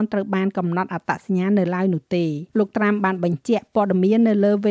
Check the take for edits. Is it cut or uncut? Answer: cut